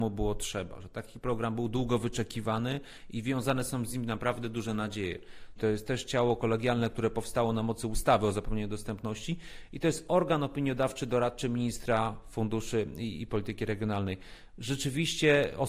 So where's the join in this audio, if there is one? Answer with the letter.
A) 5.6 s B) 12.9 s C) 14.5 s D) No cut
A